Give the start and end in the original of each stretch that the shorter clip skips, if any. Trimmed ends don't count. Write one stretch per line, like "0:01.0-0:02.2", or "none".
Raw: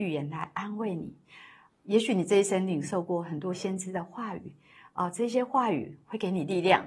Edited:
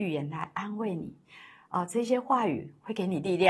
0:01.7-0:04.9